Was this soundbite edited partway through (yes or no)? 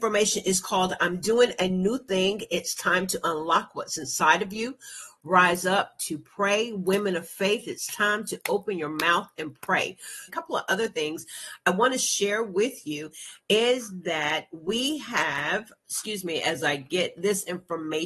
yes